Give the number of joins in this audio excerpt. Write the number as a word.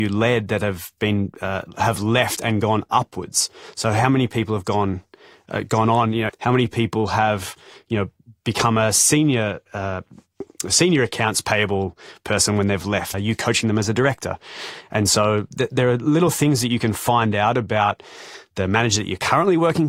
two